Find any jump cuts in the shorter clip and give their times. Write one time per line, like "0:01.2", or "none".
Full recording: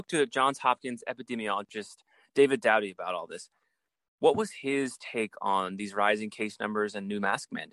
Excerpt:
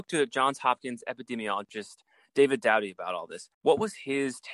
0:03.5